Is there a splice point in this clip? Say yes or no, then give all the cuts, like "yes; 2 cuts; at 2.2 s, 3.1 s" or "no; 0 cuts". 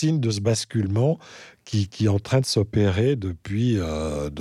no; 0 cuts